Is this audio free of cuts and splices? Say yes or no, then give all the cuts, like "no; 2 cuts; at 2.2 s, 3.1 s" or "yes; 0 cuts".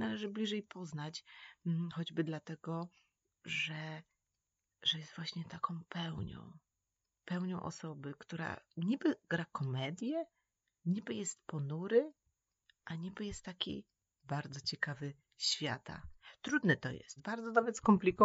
no; 2 cuts; at 14.1 s, 17.2 s